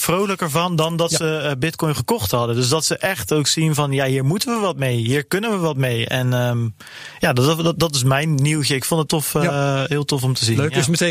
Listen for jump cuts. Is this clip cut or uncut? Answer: cut